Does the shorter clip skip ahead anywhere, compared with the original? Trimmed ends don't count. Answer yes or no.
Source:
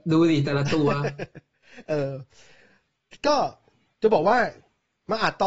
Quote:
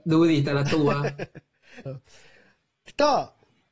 yes